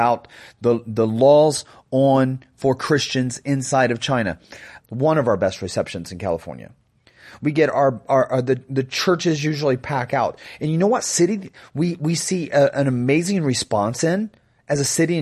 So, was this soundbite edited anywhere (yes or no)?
yes